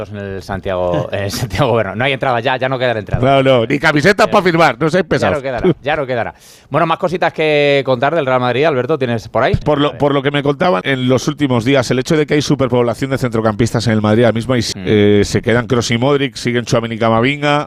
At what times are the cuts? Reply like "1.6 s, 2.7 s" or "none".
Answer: 9.6 s, 10.8 s, 14.7 s